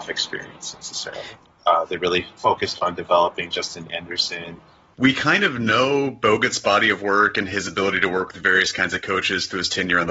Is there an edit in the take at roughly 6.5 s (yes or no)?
no